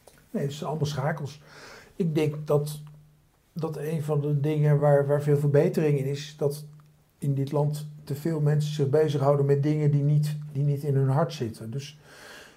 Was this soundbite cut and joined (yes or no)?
no